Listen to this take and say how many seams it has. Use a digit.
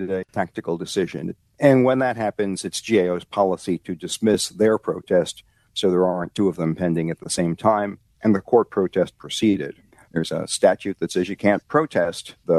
2